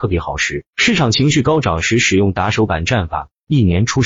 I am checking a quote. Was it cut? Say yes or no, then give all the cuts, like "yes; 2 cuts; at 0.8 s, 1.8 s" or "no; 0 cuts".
no; 0 cuts